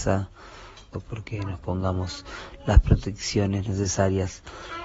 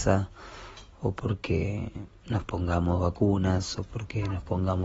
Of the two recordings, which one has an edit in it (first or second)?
first